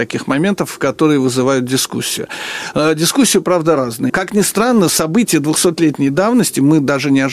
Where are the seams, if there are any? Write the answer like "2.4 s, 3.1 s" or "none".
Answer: 4.1 s